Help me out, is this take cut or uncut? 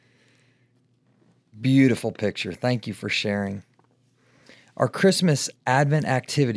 uncut